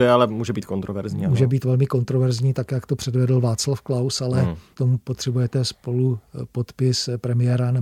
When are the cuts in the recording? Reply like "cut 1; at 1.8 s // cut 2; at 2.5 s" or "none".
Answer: none